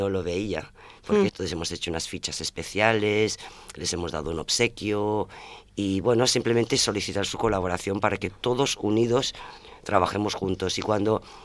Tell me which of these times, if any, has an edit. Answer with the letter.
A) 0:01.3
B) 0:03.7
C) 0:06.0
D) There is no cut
A